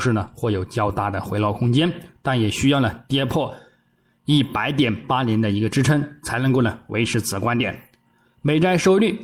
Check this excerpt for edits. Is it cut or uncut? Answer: uncut